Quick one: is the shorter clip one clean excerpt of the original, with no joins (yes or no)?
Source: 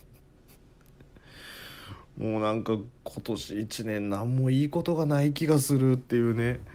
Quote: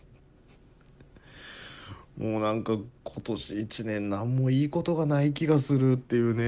yes